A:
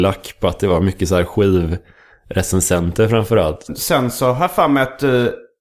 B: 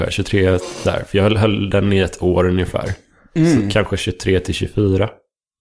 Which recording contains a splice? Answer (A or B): A